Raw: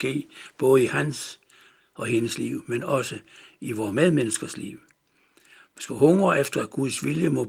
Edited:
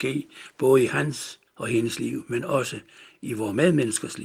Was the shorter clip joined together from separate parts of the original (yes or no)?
yes